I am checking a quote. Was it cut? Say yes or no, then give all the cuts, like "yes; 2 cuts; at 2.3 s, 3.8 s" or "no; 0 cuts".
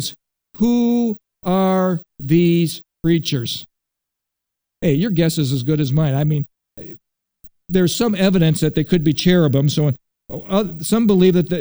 no; 0 cuts